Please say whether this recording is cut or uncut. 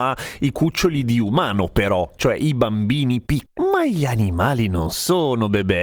cut